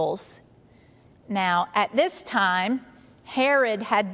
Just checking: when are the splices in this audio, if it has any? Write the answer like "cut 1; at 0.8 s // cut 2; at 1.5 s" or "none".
cut 1; at 1.1 s